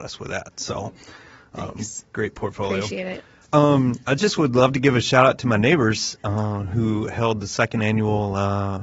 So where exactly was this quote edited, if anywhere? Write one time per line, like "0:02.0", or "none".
0:03.4